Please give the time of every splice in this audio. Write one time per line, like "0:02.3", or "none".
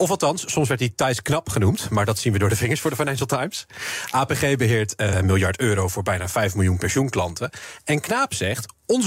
0:05.1